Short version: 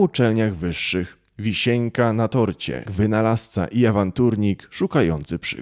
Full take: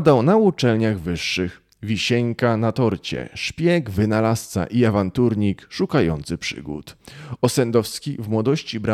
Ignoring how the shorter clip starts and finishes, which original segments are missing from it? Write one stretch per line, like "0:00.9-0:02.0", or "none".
0:03.3-0:03.8